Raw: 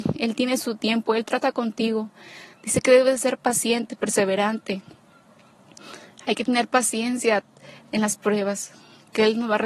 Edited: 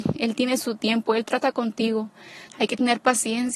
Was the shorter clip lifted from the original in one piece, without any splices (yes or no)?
no